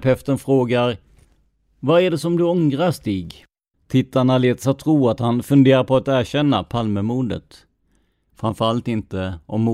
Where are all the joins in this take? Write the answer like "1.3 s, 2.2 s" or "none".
3.7 s, 8.3 s